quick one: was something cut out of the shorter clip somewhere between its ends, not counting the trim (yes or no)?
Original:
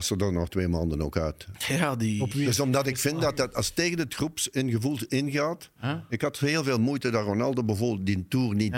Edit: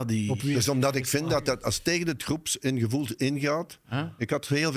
no